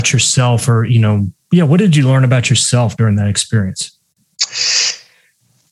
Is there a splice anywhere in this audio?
no; 0 cuts

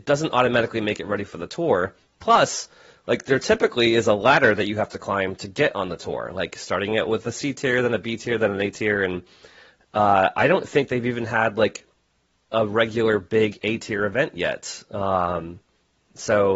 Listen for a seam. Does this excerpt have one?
no; 0 cuts

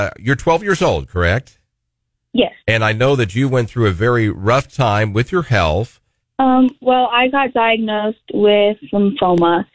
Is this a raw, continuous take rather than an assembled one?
no; 2 cuts; at 2.6 s, 6.2 s

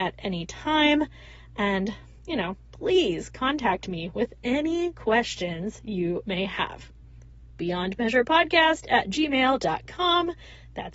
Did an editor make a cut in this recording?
no; 0 cuts

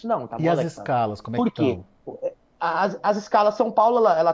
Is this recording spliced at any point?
no; 0 cuts

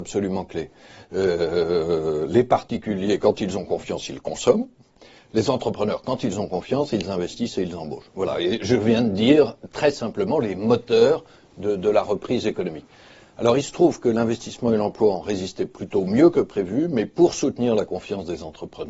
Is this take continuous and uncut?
yes; 0 cuts

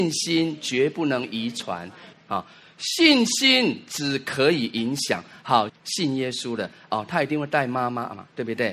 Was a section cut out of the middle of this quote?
yes; 2 cuts; at 2.1 s, 5.7 s

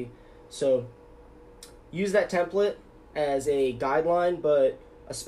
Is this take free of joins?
yes; 0 cuts

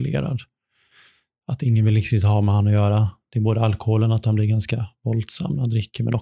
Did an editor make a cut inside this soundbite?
no; 0 cuts

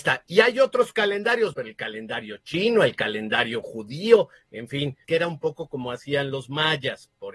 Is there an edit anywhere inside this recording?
yes; 2 cuts; at 1.5 s, 5.0 s

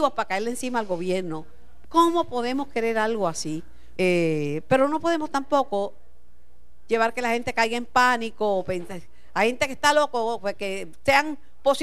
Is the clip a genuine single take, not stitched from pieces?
no; 2 cuts; at 1.8 s, 4.0 s

